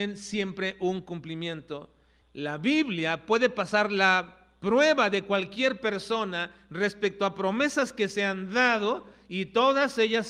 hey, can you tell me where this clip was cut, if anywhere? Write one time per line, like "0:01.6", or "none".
0:02.2